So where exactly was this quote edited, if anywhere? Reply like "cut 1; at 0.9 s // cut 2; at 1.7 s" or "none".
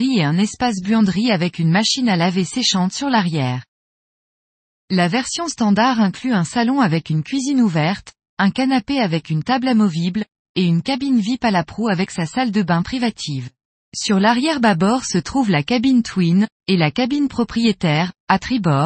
cut 1; at 13.7 s // cut 2; at 16.6 s